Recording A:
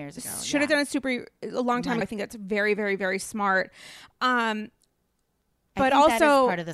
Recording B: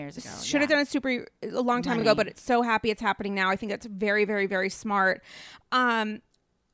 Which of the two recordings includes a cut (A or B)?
A